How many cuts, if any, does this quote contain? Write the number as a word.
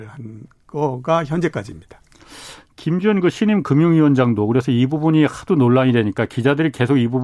zero